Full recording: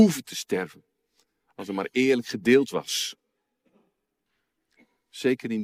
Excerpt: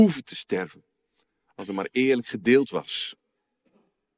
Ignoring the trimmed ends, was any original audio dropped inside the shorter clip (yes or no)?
no